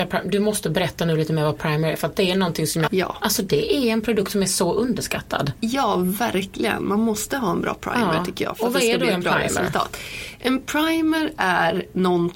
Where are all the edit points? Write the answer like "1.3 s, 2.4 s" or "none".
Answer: 2.9 s